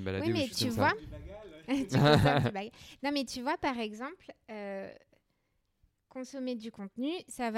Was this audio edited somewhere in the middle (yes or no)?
no